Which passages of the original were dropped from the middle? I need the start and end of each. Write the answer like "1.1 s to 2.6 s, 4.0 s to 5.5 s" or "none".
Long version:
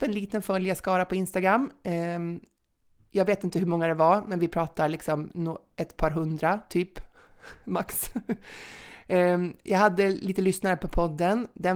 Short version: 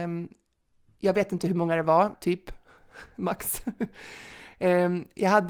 4.2 s to 6.6 s